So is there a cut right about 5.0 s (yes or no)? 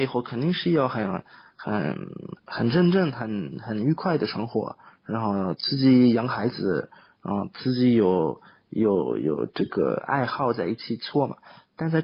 no